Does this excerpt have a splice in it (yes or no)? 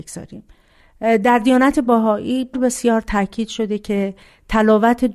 yes